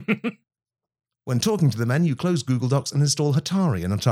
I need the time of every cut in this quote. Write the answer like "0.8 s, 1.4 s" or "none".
none